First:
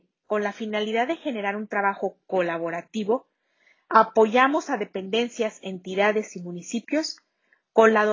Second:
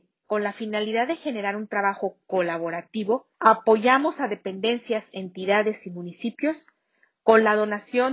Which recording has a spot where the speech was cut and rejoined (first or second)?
second